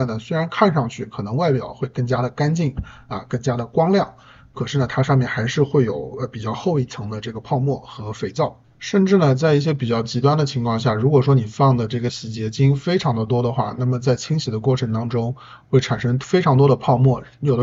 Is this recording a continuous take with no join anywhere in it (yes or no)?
yes